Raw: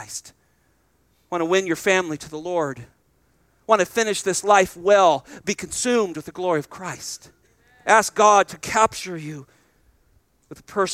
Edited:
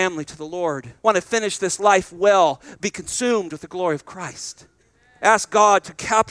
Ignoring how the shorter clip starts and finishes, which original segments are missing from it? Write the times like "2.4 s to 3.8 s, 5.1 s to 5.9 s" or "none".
2.9 s to 3.6 s